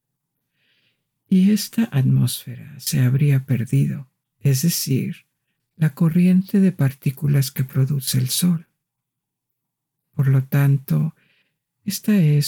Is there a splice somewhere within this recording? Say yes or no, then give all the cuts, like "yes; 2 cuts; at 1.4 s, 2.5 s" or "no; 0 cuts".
yes; 1 cut; at 4.3 s